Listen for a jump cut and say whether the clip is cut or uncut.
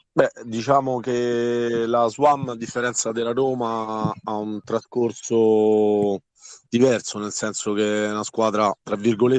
uncut